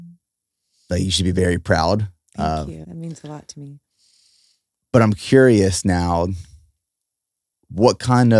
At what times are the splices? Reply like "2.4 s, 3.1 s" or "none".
2.8 s